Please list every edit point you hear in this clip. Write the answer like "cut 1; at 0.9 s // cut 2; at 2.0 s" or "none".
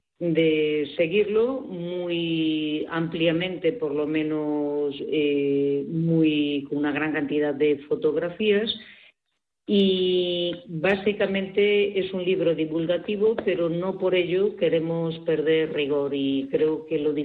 none